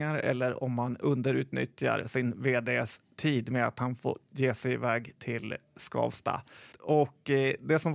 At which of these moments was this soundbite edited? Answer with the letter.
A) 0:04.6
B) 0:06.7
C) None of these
B